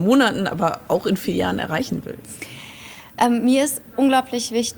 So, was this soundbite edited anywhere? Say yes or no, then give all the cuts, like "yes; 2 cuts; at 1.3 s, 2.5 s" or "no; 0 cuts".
no; 0 cuts